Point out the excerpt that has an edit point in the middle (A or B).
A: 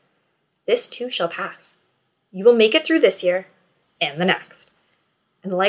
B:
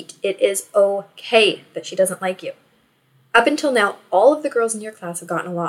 A